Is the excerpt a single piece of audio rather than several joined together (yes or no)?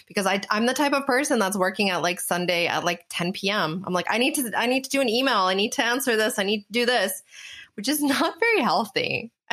yes